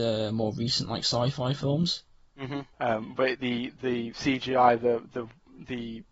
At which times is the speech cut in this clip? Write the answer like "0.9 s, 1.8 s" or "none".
2.7 s